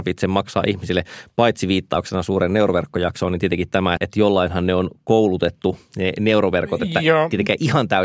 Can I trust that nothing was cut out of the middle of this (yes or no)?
no